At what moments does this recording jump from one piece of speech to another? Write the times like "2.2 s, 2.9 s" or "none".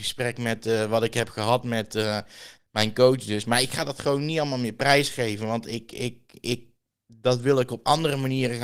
2.6 s